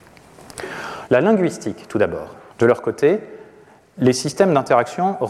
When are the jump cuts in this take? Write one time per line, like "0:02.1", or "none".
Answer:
0:01.1
0:02.5